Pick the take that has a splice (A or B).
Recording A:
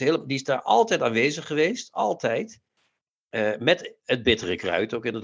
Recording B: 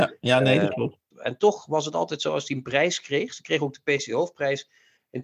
B